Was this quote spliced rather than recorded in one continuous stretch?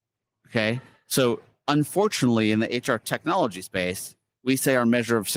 no; 0 cuts

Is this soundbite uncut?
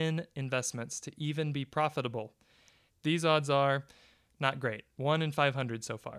no; 1 cut; at 2.9 s

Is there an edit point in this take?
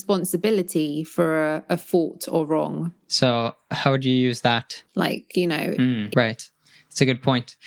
yes; 2 cuts; at 4.8 s, 6.1 s

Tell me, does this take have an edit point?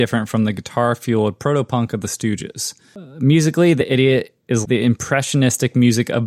yes; 1 cut; at 4.6 s

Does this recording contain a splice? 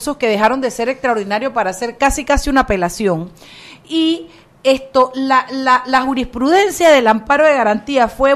no; 0 cuts

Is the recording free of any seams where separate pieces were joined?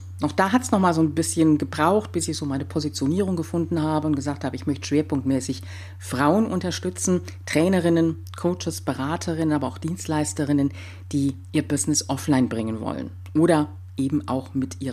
yes; 0 cuts

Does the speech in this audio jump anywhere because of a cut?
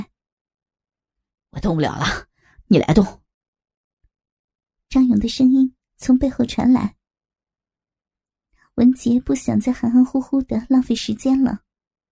no; 0 cuts

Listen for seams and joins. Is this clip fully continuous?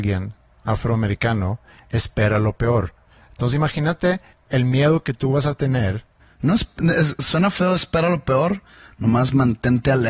yes; 0 cuts

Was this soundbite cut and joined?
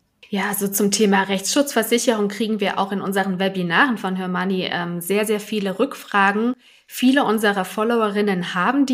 no; 0 cuts

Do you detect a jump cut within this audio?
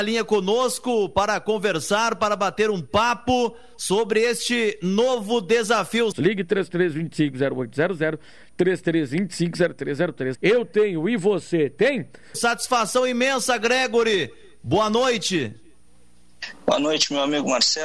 yes; 3 cuts; at 6.1 s, 10.3 s, 12.3 s

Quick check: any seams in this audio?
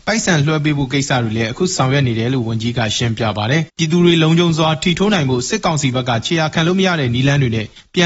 yes; 1 cut; at 3.7 s

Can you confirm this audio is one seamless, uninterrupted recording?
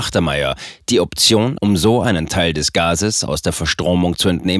no; 1 cut; at 1.6 s

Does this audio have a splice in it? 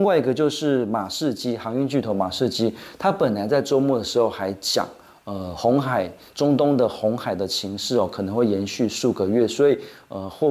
no; 0 cuts

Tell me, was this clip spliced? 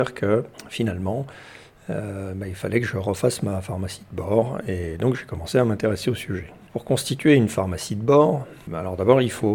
no; 0 cuts

